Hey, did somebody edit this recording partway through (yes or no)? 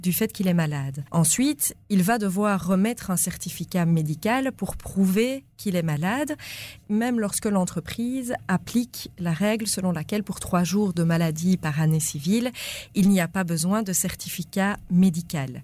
yes